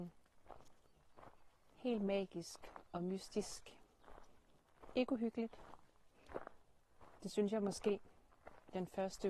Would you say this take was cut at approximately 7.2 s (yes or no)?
no